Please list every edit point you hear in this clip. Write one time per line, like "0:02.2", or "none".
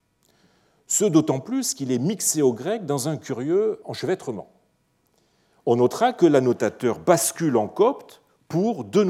0:03.8